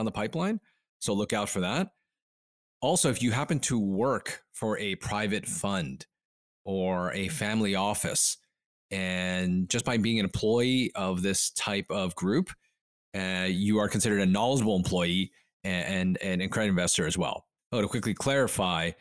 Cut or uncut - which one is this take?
uncut